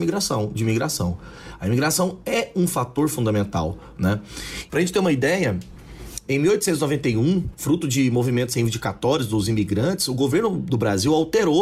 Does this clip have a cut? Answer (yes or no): yes